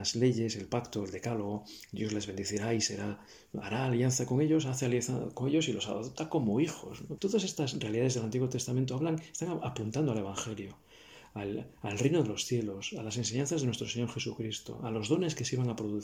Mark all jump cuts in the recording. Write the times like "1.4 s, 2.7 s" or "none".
7.2 s